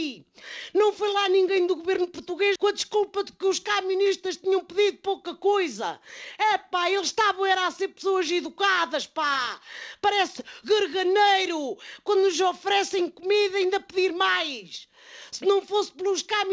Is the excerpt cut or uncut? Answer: cut